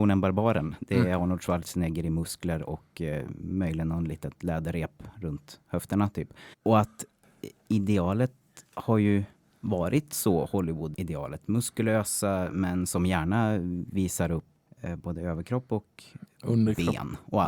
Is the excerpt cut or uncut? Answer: cut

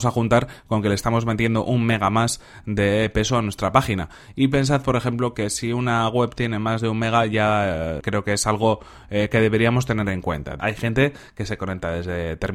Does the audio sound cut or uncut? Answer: cut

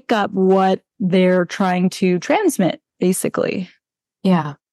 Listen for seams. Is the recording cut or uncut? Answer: uncut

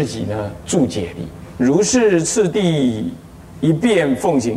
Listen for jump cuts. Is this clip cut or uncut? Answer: cut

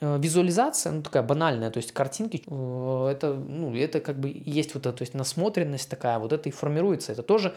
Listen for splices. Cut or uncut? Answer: cut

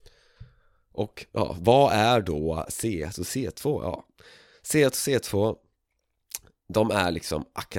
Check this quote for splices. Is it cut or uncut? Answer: uncut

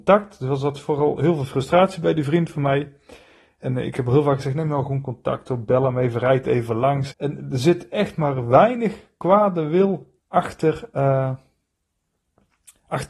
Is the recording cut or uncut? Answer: cut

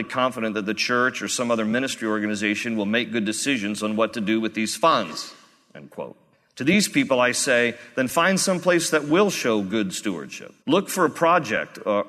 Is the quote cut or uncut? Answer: cut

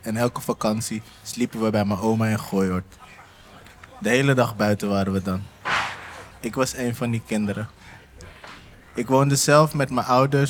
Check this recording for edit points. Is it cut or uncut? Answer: cut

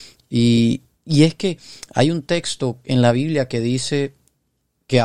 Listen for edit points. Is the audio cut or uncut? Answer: uncut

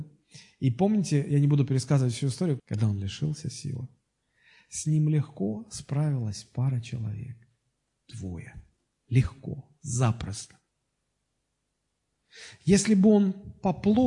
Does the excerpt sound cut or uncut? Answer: cut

